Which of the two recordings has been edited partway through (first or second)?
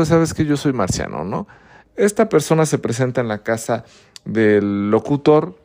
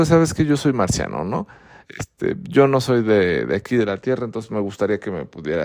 first